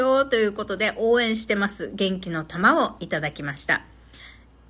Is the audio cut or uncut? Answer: uncut